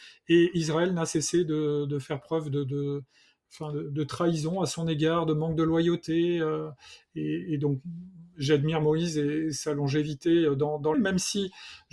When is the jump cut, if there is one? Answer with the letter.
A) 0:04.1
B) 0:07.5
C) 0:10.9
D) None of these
C